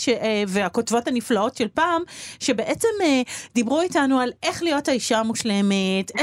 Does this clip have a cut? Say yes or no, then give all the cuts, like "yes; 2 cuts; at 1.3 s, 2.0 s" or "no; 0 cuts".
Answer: no; 0 cuts